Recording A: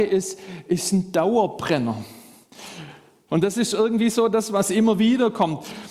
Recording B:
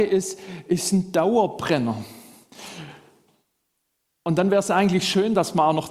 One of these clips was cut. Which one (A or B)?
A